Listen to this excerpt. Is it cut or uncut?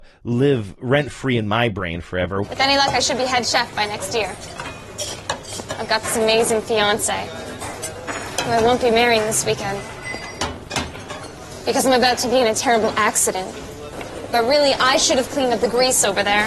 cut